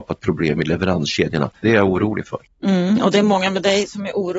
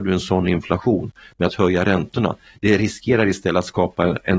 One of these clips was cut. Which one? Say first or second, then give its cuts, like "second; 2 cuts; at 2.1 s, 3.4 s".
first; 1 cut; at 1.6 s